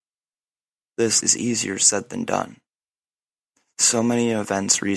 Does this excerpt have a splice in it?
yes; 1 cut; at 1.2 s

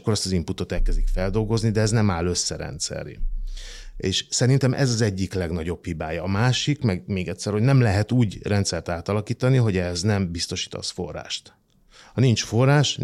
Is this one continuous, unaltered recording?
yes; 0 cuts

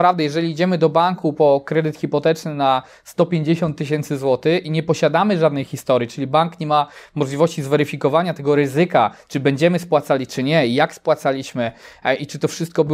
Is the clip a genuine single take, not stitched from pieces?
yes; 0 cuts

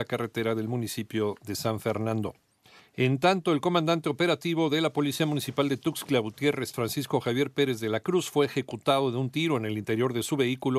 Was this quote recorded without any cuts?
no; 2 cuts; at 2.8 s, 6.7 s

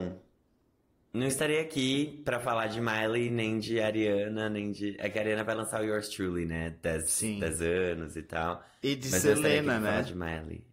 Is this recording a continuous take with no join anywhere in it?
yes; 0 cuts

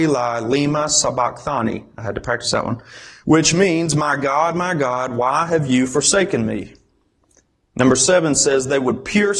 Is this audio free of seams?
yes; 0 cuts

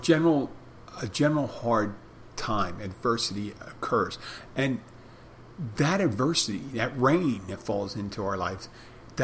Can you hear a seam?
no; 0 cuts

